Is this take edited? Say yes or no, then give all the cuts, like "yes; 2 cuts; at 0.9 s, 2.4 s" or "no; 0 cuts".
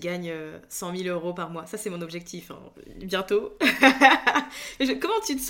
no; 0 cuts